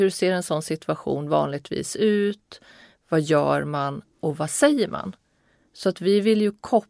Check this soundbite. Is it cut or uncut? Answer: uncut